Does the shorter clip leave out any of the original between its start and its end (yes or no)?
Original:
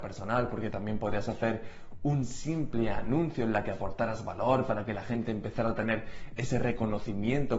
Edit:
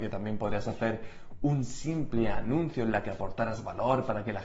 no